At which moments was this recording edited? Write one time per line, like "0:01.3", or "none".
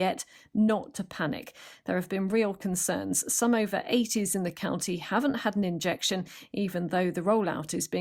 none